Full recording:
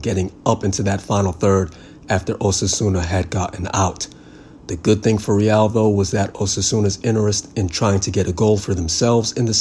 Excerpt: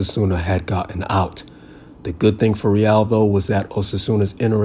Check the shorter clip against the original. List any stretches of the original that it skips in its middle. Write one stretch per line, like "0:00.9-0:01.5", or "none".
none